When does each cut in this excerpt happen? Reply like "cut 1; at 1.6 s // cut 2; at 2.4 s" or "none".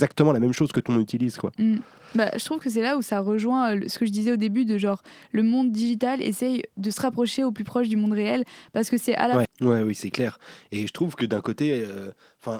cut 1; at 9.5 s